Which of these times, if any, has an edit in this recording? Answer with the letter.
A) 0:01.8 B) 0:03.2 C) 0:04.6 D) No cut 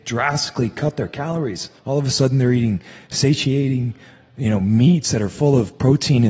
A